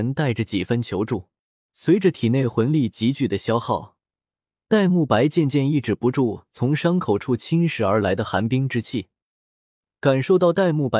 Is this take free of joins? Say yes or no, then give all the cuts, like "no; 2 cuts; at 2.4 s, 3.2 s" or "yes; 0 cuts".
no; 1 cut; at 1.7 s